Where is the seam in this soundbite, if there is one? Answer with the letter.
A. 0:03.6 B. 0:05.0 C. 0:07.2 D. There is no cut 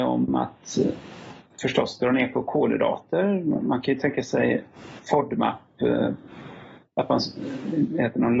B